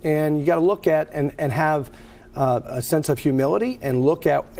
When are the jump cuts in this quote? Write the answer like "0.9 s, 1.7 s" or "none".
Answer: 2.6 s

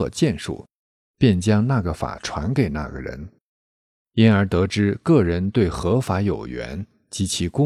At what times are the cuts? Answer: 4.0 s

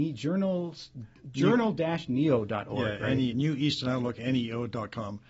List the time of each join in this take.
3.3 s

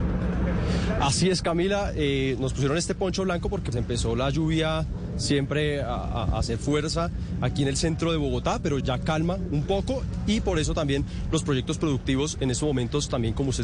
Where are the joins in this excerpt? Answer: 3.7 s, 8.8 s

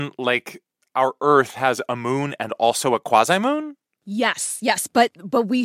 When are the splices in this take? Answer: none

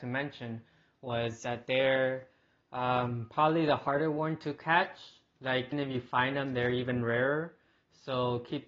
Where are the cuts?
5.7 s

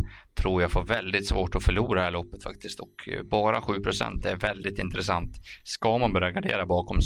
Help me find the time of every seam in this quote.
none

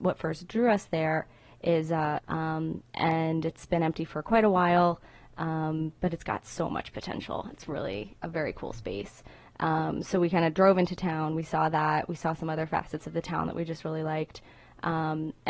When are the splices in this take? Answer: 2.2 s

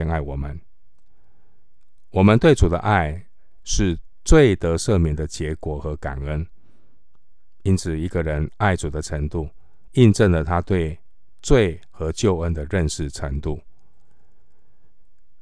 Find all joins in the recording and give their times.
none

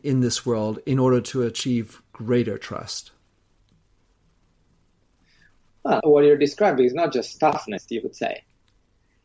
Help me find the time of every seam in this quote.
6.0 s, 7.9 s

